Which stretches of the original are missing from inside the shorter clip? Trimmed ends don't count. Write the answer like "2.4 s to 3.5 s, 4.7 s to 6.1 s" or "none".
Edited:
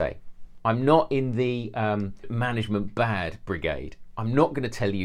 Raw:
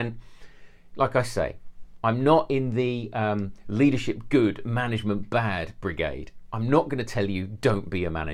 3.6 s to 4.6 s